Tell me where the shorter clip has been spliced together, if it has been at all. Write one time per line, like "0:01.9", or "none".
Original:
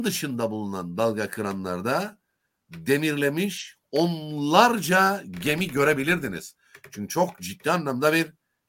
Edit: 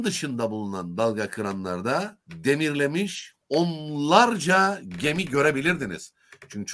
0:02.2